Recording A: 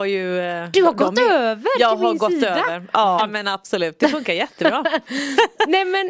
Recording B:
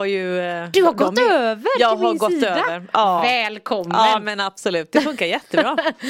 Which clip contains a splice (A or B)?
A